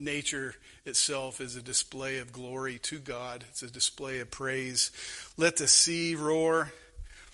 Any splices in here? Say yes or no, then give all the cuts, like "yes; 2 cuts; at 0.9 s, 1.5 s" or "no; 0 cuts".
no; 0 cuts